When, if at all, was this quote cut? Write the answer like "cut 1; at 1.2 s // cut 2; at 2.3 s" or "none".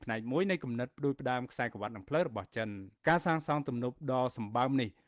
cut 1; at 3.0 s